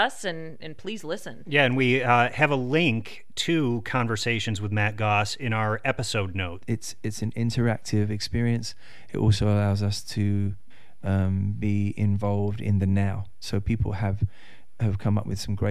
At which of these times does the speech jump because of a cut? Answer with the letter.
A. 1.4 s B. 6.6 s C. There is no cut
B